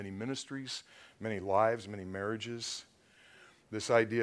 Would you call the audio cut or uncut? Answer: uncut